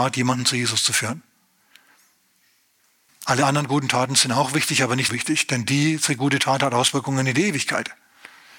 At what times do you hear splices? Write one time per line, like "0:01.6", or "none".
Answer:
0:03.1
0:05.1